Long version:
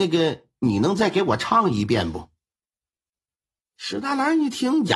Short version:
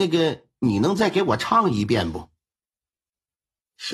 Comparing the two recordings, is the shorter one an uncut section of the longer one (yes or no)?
yes